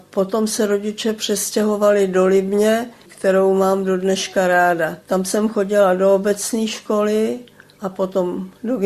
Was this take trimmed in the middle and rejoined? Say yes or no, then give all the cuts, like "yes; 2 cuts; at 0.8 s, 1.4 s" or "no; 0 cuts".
yes; 2 cuts; at 3.0 s, 5.0 s